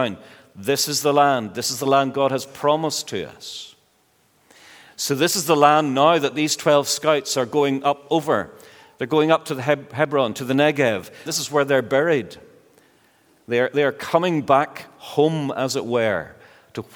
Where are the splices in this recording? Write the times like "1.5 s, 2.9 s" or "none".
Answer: 11.3 s